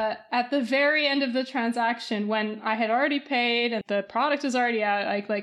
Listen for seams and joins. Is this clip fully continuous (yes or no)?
no